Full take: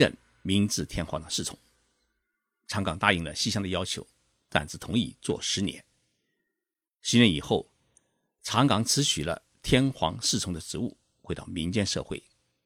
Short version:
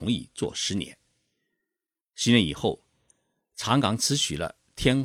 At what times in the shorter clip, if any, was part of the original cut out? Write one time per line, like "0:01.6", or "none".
none